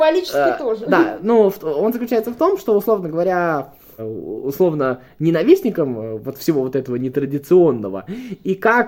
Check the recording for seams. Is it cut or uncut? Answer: cut